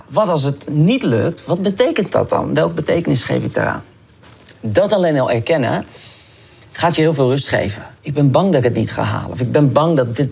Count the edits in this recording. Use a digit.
1